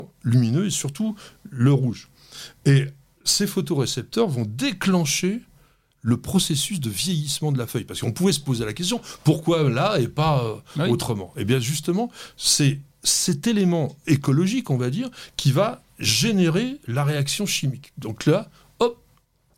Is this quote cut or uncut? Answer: uncut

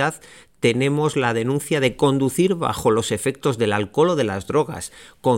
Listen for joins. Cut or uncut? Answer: uncut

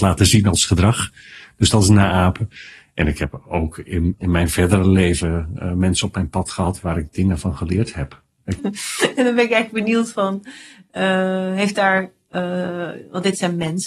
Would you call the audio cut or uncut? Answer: cut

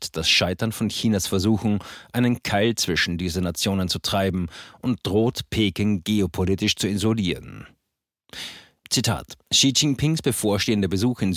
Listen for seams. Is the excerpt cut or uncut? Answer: uncut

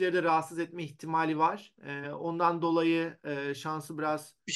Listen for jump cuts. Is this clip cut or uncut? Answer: uncut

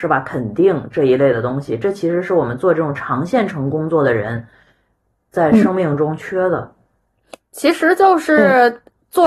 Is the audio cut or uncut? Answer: uncut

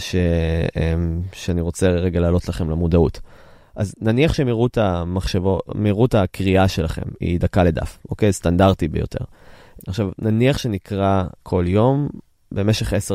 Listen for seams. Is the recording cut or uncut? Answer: cut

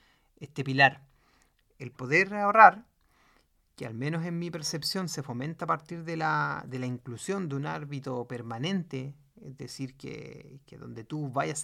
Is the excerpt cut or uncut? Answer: cut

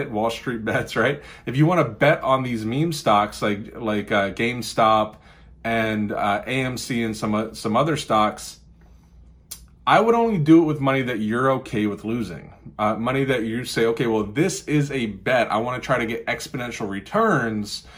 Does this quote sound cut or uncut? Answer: uncut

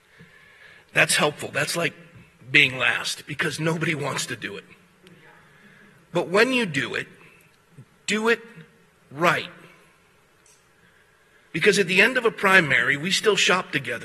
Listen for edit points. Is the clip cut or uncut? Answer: uncut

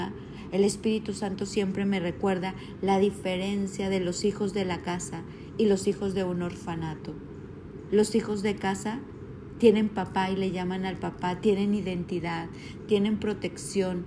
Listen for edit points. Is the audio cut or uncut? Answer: cut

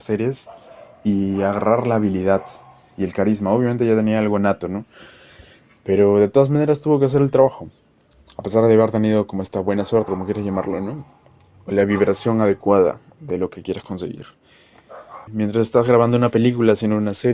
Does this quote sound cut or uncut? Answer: cut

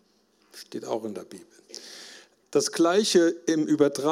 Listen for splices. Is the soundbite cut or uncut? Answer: cut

